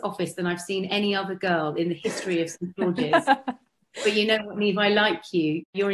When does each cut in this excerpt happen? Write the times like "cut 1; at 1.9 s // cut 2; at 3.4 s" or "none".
none